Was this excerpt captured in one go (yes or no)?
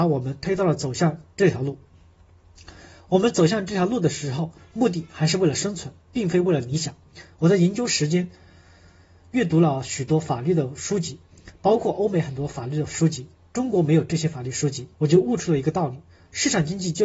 no